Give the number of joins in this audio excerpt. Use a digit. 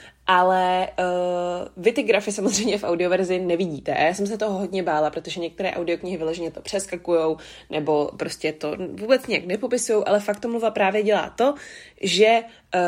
0